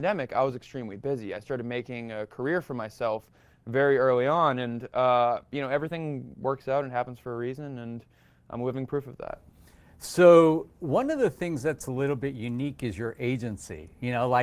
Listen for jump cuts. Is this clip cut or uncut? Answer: uncut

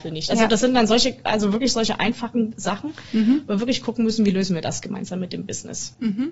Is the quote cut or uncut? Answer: uncut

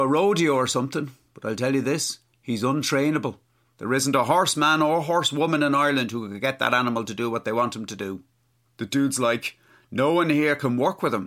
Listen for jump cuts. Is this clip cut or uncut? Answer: cut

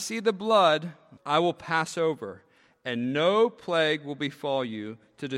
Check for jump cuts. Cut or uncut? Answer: cut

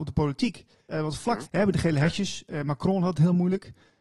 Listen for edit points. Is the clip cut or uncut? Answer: cut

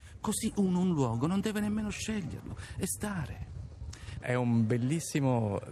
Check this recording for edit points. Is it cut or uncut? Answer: cut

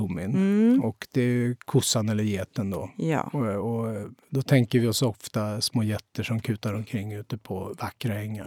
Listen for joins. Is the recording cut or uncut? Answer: uncut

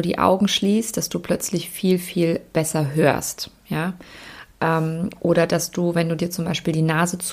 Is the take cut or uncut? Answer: uncut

